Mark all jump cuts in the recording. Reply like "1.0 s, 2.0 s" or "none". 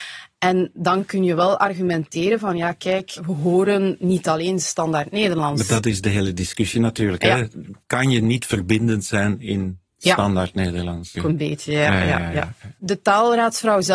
7.8 s, 11.1 s

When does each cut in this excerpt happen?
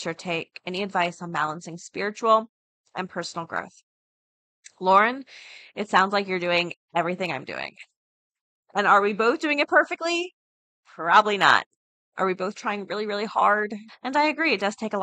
13.9 s

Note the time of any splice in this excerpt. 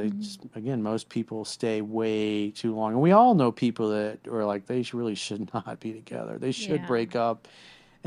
none

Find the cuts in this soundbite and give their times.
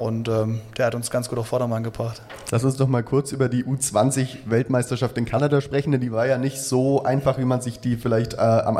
none

